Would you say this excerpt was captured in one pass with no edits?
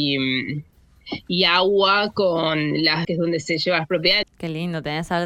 no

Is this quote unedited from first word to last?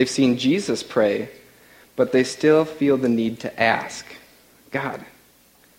yes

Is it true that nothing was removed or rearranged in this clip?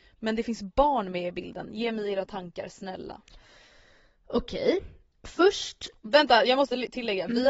yes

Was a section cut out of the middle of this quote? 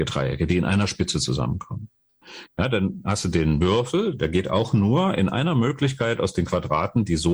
yes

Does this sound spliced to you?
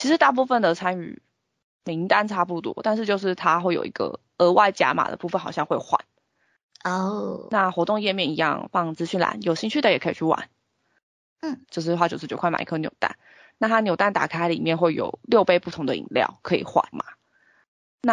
yes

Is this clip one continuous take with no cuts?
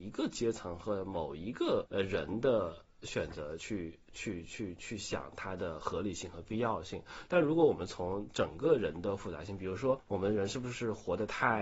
yes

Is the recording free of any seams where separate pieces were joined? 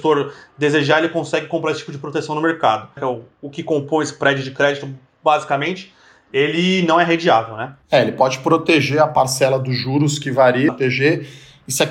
no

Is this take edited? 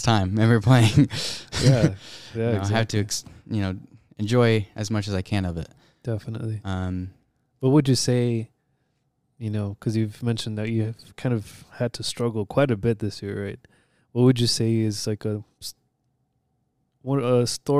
no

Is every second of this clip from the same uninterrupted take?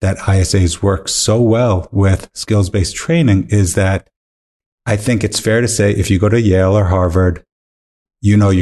yes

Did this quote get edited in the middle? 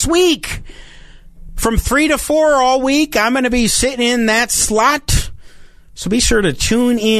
no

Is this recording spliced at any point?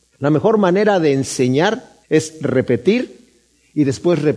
yes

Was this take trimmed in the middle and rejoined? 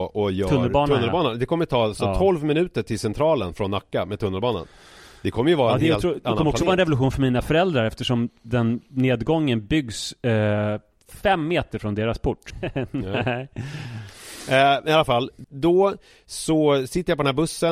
yes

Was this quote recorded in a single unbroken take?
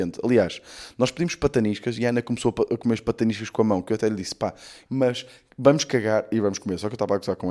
no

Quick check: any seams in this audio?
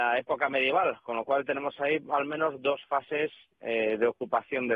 no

